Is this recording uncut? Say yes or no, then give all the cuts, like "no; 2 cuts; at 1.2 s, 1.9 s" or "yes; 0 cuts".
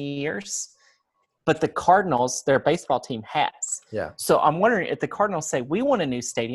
yes; 0 cuts